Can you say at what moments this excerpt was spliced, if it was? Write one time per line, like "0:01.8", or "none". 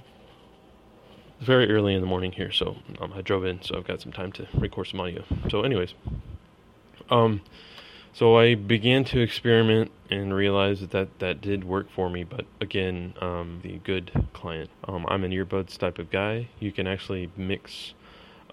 0:13.6
0:14.7